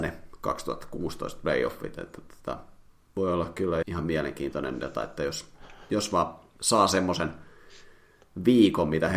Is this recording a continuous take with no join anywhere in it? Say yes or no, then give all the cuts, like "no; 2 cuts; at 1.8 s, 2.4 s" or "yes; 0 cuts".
no; 1 cut; at 3.8 s